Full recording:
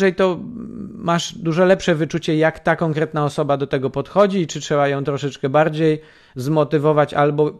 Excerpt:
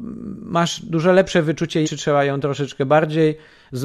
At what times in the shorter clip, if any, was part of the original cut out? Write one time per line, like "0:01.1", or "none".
0:01.8